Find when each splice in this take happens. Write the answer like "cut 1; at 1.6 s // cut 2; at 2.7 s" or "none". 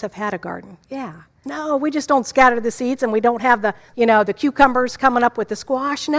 cut 1; at 1.4 s // cut 2; at 3.9 s